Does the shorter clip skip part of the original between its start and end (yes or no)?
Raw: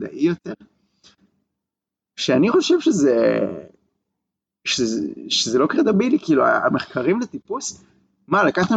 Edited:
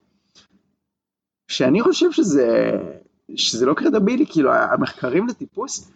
yes